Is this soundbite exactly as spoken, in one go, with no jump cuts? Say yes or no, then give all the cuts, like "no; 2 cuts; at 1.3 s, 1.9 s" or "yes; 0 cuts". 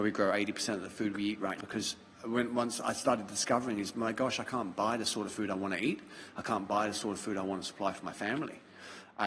no; 1 cut; at 1.6 s